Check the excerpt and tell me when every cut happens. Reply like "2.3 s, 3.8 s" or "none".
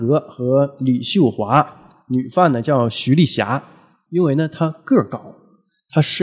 4.1 s

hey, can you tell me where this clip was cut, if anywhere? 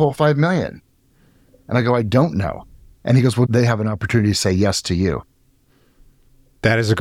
3.4 s

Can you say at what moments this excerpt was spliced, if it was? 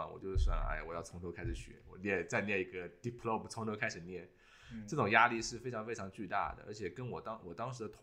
none

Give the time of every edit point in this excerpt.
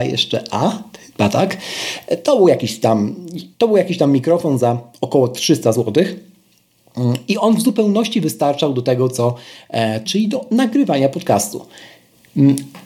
3.5 s, 10.1 s

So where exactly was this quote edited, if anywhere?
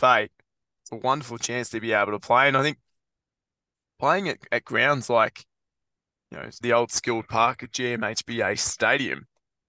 6.6 s

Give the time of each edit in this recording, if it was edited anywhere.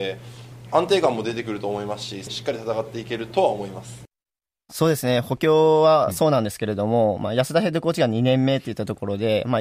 4.7 s

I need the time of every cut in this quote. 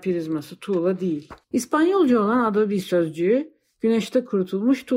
1.4 s

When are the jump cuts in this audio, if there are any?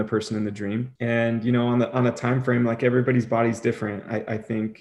1.0 s

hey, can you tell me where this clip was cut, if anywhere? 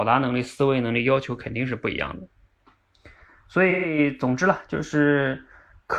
none

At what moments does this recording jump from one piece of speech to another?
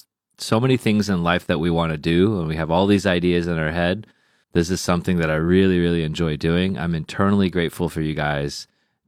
4.4 s

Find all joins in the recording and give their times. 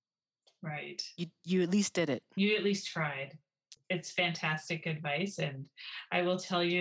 3.7 s

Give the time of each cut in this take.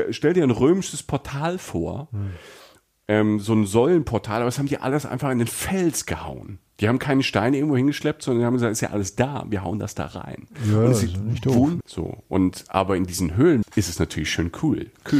11.8 s, 13.6 s

